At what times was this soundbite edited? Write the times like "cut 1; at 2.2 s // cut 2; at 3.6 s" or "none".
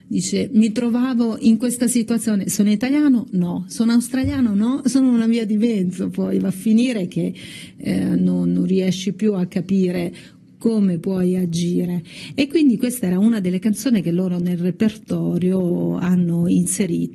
none